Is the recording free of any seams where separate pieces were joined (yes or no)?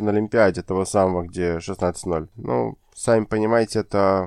no